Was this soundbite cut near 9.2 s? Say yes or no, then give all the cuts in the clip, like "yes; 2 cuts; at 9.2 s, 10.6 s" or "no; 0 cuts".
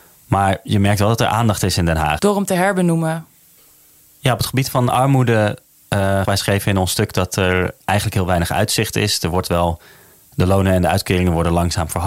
no; 2 cuts; at 2.2 s, 6.2 s